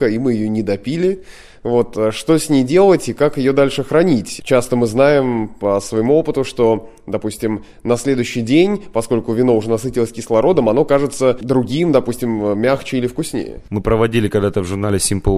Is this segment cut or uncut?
uncut